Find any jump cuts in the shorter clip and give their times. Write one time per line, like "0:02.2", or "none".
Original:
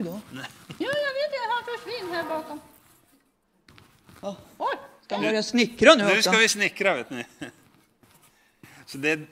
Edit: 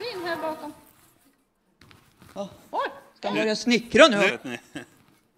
0:04.3